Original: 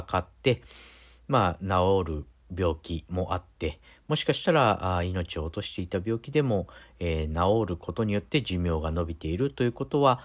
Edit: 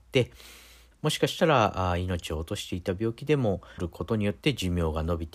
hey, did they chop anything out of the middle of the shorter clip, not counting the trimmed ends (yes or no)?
yes